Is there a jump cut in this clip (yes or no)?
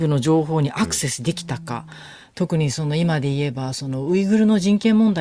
no